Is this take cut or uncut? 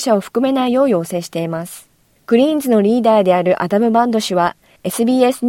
cut